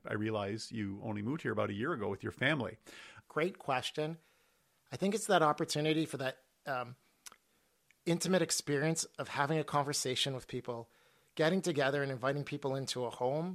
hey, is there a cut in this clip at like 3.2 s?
yes; 1 cut; at 3.2 s

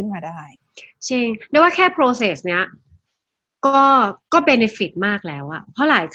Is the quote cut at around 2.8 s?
no; 1 cut; at 4.2 s

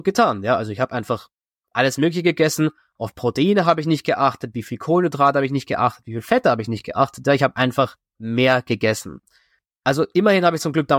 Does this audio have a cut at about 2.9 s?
no; 0 cuts

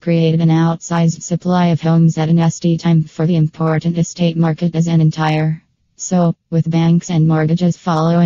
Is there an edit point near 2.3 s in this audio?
no; 1 cut; at 5.9 s

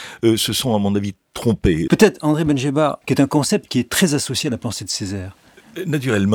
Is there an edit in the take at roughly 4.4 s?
no; 2 cuts; at 1.9 s, 3.0 s

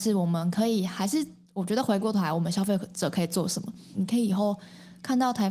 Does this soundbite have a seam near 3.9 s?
yes; 1 cut; at 3.9 s

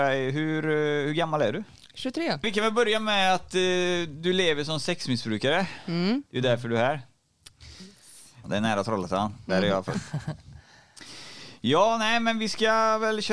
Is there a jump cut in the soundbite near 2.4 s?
yes; 3 cuts; at 2.4 s, 6.3 s, 8.4 s

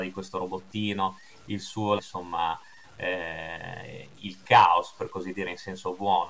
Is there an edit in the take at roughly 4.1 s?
no; 1 cut; at 2.0 s

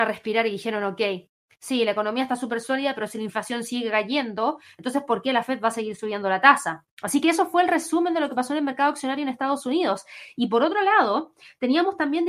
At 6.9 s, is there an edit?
yes; 1 cut; at 6.9 s

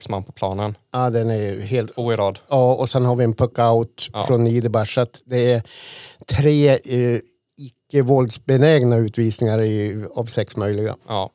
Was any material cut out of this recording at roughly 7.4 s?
no; 0 cuts

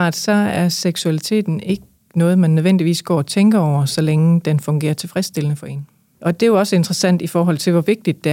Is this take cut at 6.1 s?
yes; 1 cut; at 6.1 s

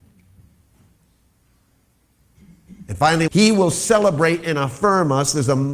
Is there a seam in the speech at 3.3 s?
yes; 1 cut; at 3.3 s

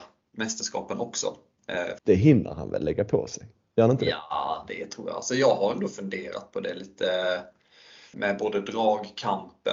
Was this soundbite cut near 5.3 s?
no; 2 cuts; at 2.0 s, 8.1 s

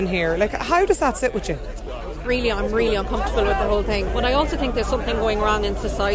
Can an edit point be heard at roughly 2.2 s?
no; 1 cut; at 4.1 s

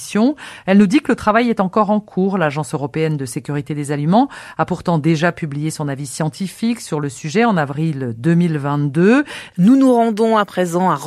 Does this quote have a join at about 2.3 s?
no; 1 cut; at 9.5 s

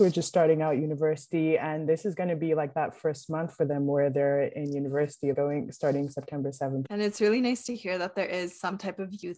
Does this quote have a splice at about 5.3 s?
yes; 2 cuts; at 5.3 s, 6.9 s

